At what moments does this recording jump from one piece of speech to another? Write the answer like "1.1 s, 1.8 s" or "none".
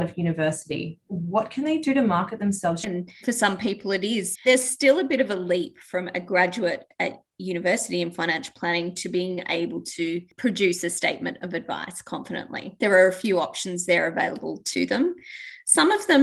2.8 s, 4.3 s, 12.8 s